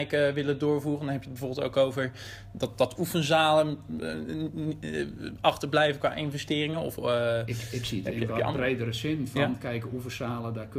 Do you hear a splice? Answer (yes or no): no